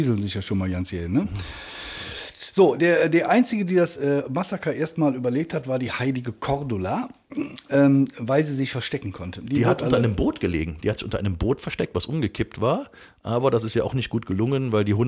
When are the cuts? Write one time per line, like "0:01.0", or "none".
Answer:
none